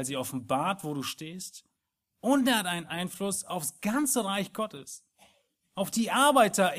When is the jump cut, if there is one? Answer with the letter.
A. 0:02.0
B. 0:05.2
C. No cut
C